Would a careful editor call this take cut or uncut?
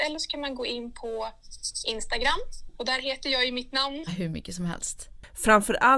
cut